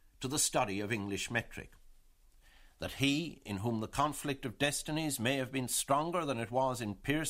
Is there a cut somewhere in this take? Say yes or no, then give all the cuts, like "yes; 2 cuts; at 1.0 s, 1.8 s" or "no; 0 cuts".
no; 0 cuts